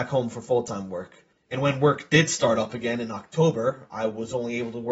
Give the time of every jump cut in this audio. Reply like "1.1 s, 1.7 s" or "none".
1.3 s